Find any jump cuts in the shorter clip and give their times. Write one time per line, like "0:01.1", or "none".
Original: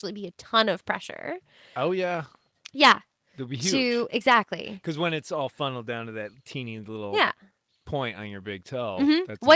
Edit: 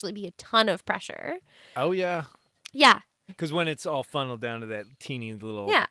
0:03.3